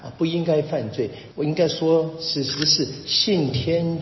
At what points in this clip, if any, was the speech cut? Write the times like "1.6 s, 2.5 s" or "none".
1.3 s